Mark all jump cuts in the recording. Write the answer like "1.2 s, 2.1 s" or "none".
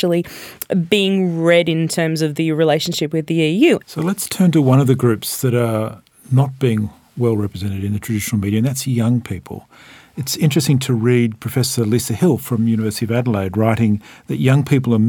3.8 s